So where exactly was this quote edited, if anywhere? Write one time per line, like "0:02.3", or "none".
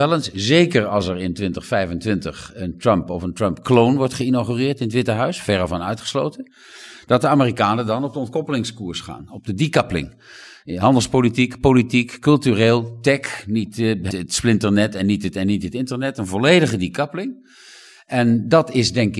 0:14.1

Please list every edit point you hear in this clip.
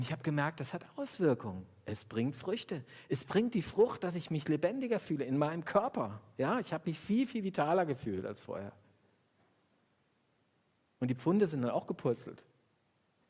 none

